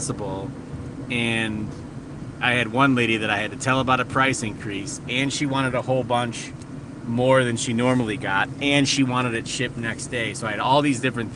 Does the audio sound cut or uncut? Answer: uncut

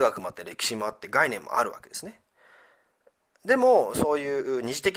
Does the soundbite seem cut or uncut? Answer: uncut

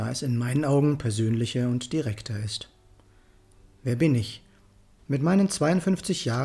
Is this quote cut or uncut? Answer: cut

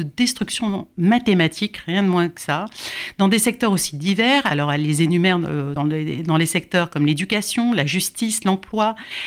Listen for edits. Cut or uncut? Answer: cut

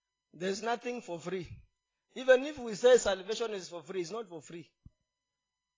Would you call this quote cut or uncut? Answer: uncut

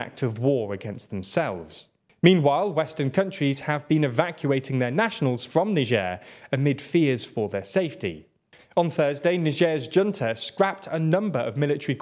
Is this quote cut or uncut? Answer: cut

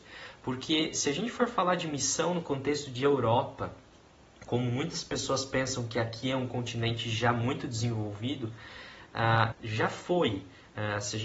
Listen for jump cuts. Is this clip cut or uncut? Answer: cut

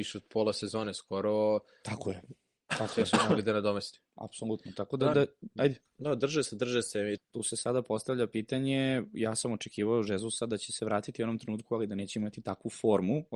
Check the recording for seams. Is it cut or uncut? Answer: cut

